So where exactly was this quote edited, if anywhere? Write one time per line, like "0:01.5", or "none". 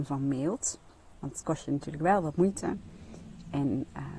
0:01.1